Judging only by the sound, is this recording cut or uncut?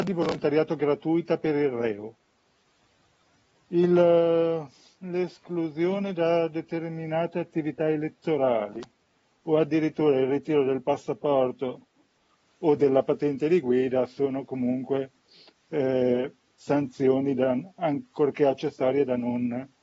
uncut